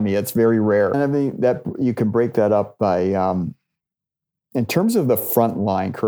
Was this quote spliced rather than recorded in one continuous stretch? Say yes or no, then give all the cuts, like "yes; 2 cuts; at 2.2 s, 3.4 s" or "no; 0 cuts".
yes; 1 cut; at 0.9 s